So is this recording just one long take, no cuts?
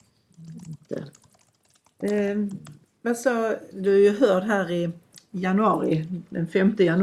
no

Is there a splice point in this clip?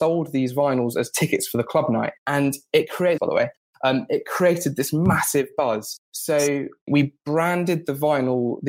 yes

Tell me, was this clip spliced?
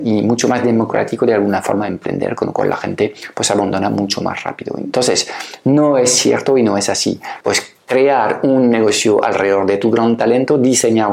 yes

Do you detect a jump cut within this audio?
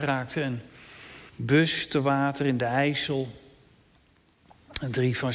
yes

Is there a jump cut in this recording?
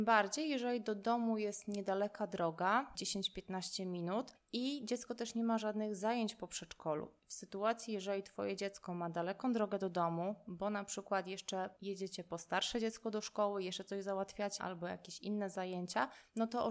yes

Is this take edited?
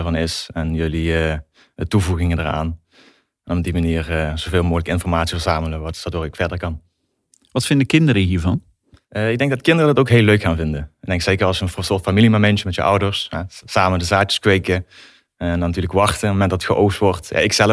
no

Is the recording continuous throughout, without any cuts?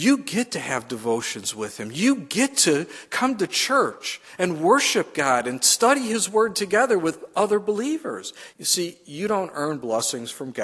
no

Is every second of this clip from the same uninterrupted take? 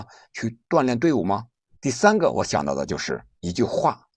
no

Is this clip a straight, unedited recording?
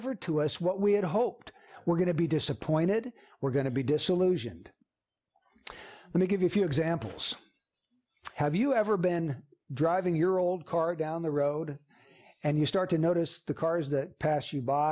yes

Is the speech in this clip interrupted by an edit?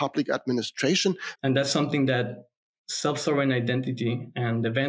yes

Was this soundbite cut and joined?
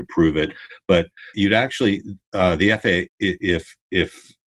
yes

